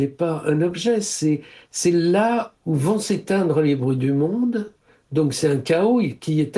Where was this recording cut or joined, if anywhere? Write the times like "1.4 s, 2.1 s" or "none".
none